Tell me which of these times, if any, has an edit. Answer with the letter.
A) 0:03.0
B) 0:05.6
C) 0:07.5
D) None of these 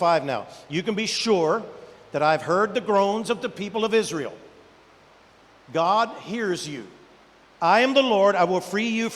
C